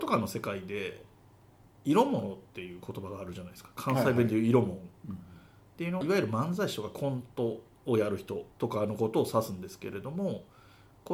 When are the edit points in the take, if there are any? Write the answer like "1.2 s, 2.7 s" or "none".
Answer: 6.0 s, 8.5 s